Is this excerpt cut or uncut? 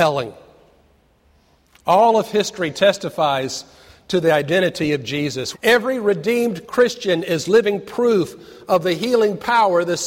cut